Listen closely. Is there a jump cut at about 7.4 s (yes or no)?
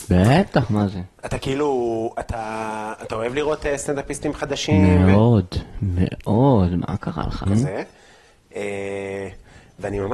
yes